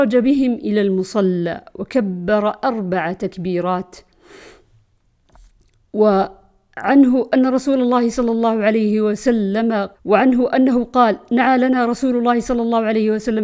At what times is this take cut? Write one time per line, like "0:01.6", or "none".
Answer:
0:09.9